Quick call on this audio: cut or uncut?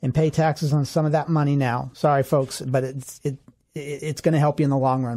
uncut